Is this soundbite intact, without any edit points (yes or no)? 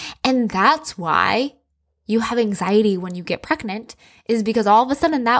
yes